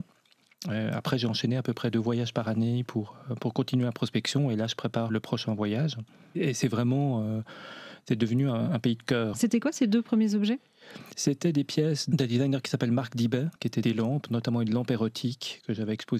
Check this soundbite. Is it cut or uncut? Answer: cut